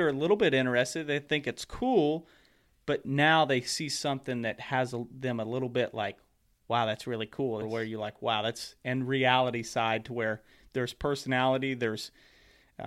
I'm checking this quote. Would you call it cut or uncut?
cut